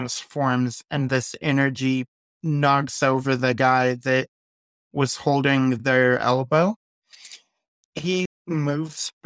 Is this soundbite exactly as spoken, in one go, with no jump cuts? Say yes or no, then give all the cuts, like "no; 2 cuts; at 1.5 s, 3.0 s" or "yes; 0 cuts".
no; 1 cut; at 8.3 s